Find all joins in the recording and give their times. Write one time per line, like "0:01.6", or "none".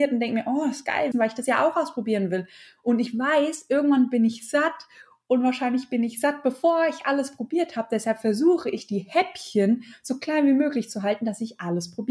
0:01.1